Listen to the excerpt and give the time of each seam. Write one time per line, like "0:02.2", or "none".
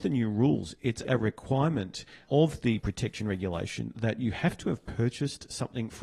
0:01.0